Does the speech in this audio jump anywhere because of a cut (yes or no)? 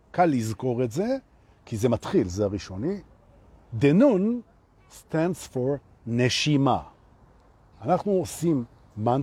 yes